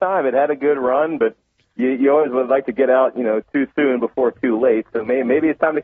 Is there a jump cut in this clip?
no; 0 cuts

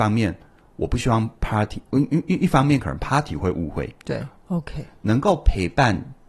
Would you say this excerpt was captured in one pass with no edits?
no; 1 cut; at 4.4 s

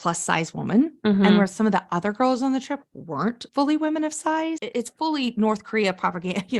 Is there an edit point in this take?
yes; 2 cuts; at 3.5 s, 4.6 s

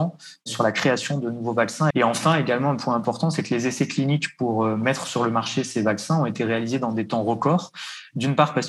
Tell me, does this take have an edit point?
yes; 1 cut; at 1.9 s

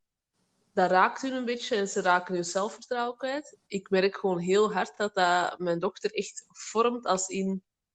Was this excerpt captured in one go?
yes; 0 cuts

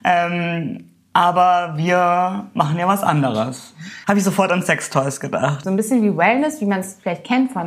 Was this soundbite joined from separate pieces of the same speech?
yes; 2 cuts; at 4.0 s, 5.6 s

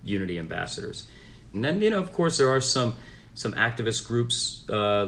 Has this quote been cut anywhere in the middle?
yes; 1 cut; at 1.5 s

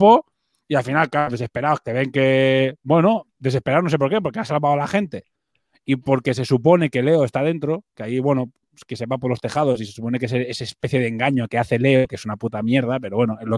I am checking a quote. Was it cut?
no; 0 cuts

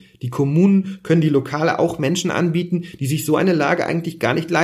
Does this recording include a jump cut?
no; 0 cuts

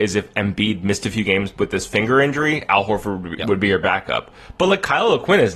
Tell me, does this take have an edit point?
no; 0 cuts

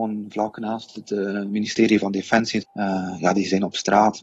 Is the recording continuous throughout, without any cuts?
no; 1 cut; at 2.6 s

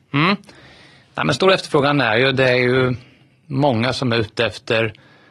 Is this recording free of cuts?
yes; 0 cuts

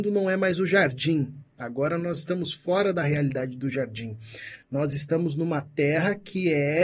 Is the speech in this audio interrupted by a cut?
no; 0 cuts

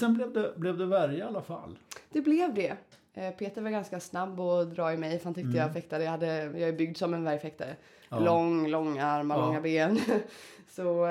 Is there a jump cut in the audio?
no; 0 cuts

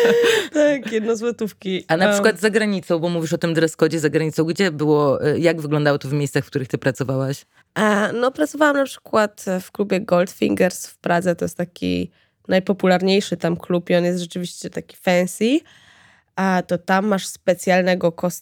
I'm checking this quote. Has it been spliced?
no; 0 cuts

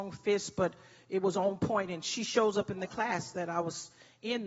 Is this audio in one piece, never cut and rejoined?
yes; 0 cuts

